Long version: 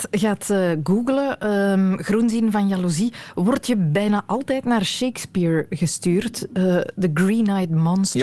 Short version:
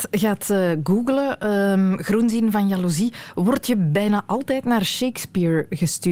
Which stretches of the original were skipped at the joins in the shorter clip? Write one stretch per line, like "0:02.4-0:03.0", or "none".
none